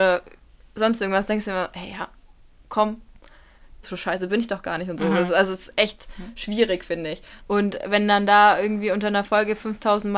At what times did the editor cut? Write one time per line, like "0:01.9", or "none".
0:03.8
0:07.4